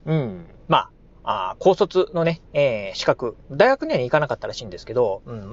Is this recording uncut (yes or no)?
yes